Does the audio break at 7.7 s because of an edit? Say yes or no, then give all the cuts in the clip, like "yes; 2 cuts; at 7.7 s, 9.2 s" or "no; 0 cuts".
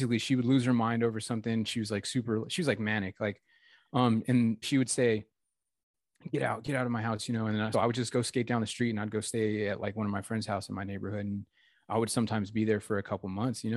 yes; 2 cuts; at 4.6 s, 7.7 s